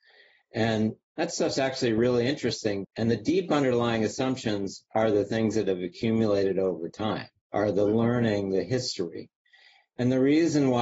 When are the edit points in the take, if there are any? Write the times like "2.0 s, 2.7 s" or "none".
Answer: 2.8 s